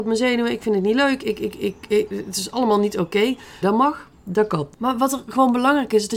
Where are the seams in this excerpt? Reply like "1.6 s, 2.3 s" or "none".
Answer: 3.6 s

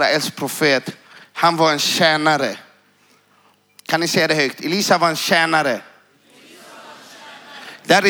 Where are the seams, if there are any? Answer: none

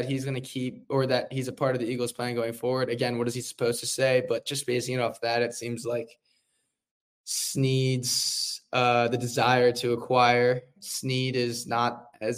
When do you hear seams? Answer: none

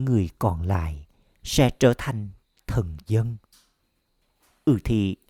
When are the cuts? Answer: none

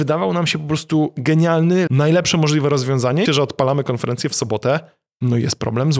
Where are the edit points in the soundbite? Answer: 1.9 s, 3.3 s

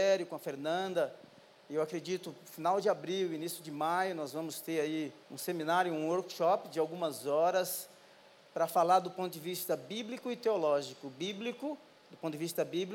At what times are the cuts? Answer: 5.2 s

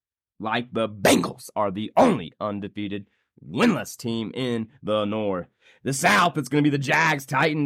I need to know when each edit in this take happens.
none

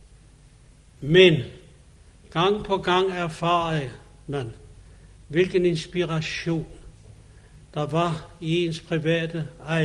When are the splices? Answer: none

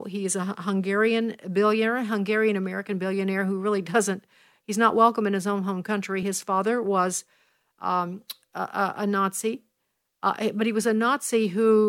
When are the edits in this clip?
none

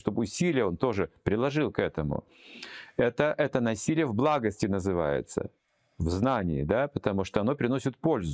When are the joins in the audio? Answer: none

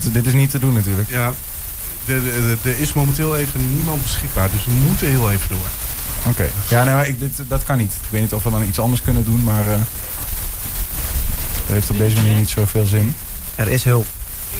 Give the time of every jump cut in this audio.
8.0 s

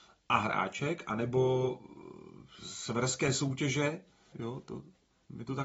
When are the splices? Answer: 4.3 s

